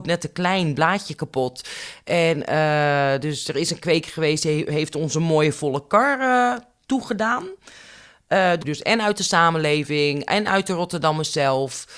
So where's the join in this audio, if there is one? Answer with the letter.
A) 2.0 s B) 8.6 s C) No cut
B